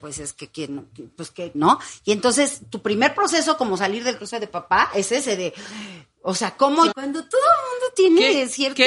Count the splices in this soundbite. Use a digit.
2